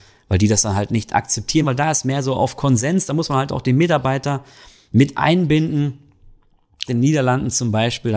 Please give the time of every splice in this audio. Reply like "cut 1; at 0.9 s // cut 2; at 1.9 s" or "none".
cut 1; at 1.6 s // cut 2; at 6.9 s